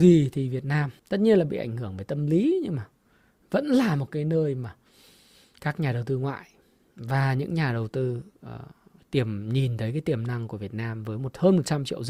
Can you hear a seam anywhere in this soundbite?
yes; 1 cut; at 1.0 s

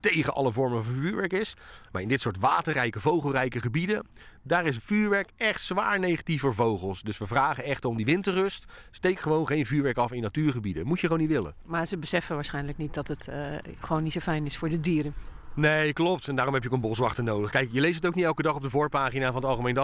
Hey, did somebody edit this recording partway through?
no; 0 cuts

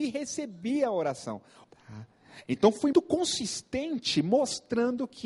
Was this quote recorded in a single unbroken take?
no; 2 cuts; at 1.6 s, 2.9 s

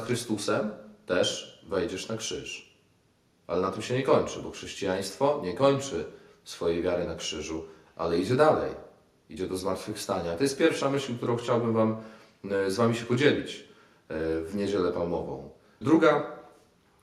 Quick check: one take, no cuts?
no; 1 cut; at 15.8 s

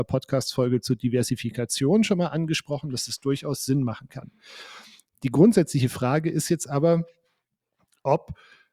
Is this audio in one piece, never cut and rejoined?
yes; 0 cuts

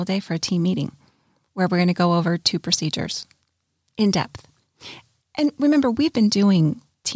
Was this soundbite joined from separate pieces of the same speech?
no; 0 cuts

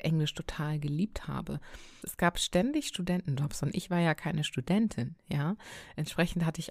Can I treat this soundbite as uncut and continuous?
no; 1 cut; at 2.0 s

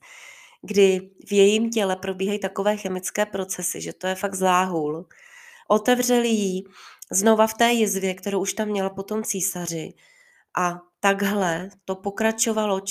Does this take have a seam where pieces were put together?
yes; 1 cut; at 5.6 s

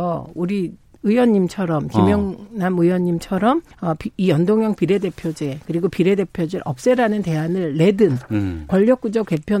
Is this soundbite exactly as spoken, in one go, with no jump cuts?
no; 2 cuts; at 3.7 s, 8.7 s

